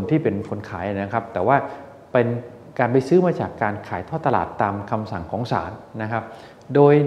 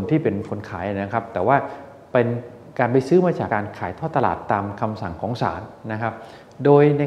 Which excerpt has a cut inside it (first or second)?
second